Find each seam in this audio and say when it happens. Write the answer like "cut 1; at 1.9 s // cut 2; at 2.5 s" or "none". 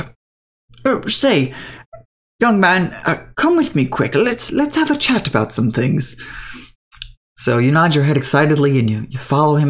none

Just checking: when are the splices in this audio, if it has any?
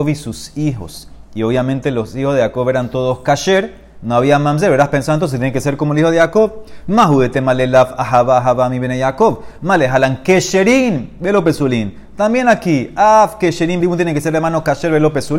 cut 1; at 13.8 s

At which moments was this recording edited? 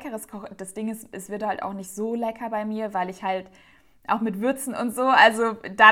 none

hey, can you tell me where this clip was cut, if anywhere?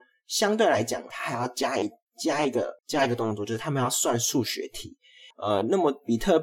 cut 1; at 1.1 s // cut 2; at 2.8 s // cut 3; at 5.3 s

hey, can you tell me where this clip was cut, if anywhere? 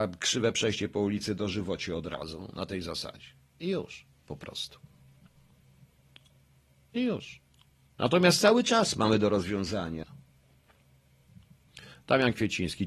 cut 1; at 7.9 s // cut 2; at 10.0 s

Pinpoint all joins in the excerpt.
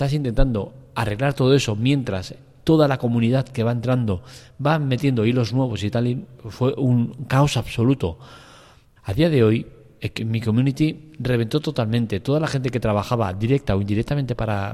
cut 1; at 9.0 s // cut 2; at 10.2 s

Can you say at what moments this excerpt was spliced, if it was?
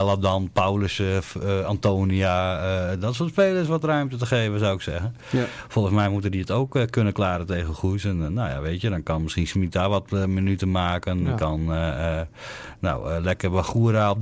none

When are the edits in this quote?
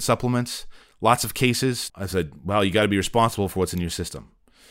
cut 1; at 1.9 s

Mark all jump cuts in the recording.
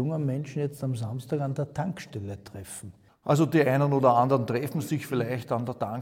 cut 1; at 3.1 s

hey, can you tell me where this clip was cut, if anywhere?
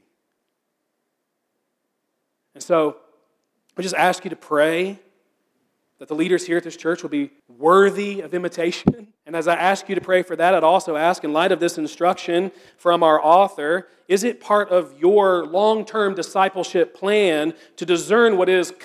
cut 1; at 7.4 s // cut 2; at 9.2 s

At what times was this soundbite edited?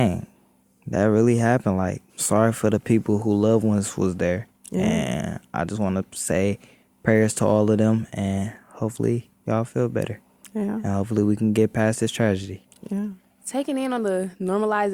cut 1; at 2.1 s

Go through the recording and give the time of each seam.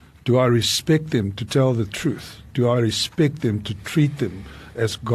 none

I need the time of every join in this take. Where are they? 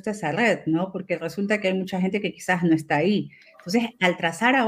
none

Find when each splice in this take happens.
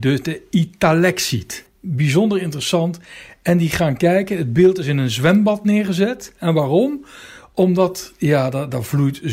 cut 1; at 1.7 s

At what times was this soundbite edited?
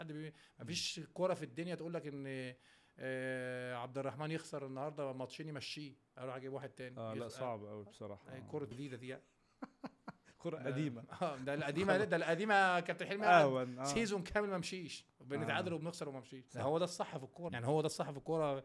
cut 1; at 8.7 s // cut 2; at 16.5 s // cut 3; at 17.5 s

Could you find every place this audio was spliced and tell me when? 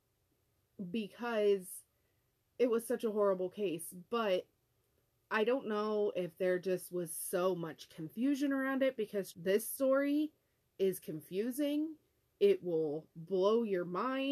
cut 1; at 9.3 s

